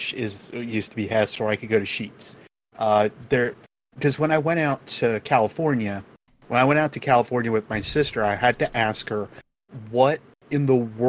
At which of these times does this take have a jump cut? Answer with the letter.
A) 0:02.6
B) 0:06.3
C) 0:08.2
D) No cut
B